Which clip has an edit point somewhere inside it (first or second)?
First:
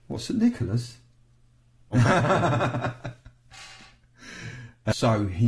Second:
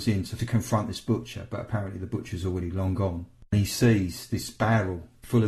first